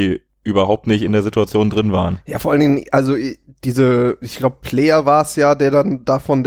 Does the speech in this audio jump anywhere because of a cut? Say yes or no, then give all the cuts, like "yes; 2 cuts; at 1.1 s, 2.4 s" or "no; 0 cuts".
no; 0 cuts